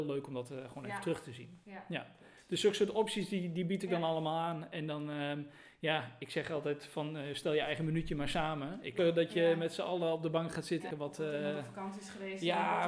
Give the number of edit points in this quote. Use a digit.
2